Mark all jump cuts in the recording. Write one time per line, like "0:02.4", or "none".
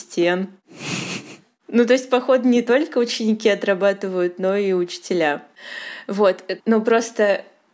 0:06.6